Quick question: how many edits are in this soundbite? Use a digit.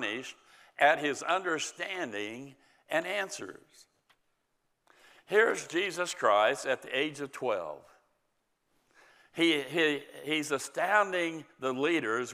0